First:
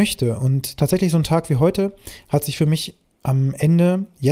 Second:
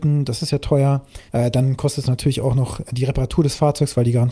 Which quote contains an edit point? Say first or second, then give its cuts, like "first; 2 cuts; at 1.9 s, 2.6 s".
second; 1 cut; at 1.3 s